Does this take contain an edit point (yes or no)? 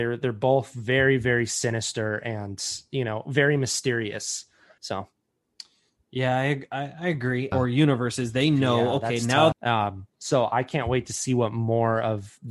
yes